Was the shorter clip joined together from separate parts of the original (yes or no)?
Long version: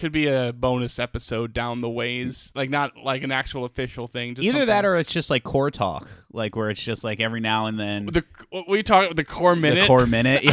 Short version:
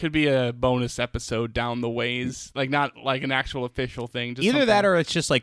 no